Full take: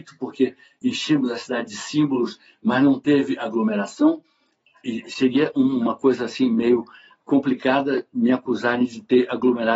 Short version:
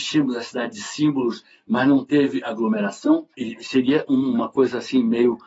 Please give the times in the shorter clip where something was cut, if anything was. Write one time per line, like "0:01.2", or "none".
0:03.3